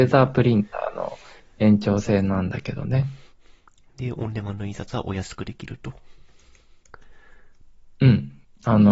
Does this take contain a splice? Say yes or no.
no